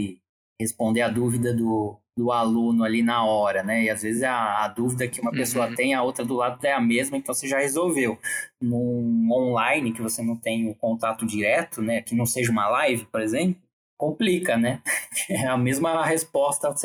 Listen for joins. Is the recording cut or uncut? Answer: uncut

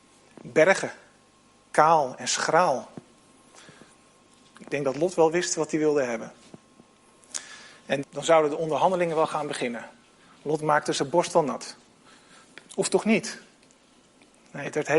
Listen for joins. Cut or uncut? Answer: cut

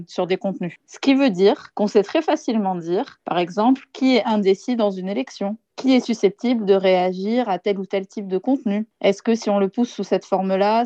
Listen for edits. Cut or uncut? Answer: uncut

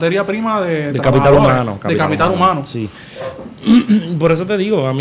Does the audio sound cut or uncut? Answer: uncut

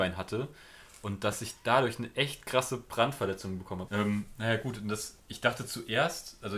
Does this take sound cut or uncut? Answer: cut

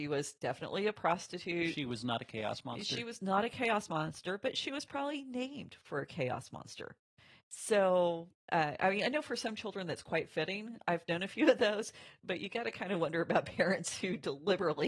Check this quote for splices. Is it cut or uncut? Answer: uncut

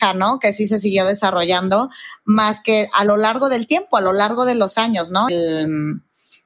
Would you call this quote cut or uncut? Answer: cut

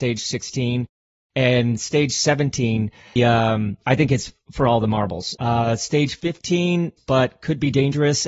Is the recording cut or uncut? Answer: cut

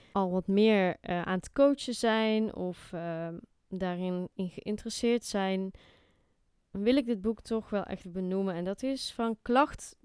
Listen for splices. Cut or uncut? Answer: cut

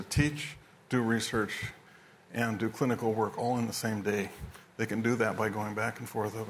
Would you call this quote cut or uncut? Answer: uncut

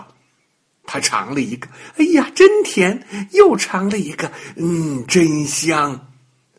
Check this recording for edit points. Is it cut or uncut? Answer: uncut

